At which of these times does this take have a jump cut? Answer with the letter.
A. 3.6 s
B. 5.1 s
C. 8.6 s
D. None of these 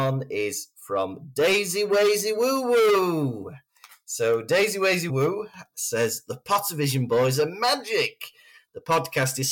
B